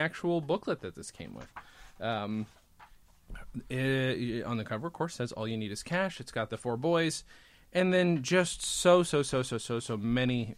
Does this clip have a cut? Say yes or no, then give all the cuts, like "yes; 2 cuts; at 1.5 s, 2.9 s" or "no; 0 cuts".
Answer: no; 0 cuts